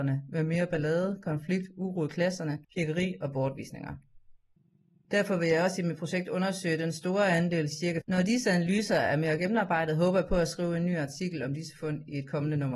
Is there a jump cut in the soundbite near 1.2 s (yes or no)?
no